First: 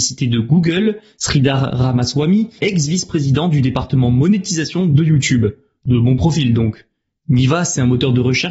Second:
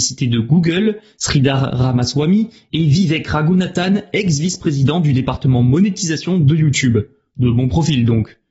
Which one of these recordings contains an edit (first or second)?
first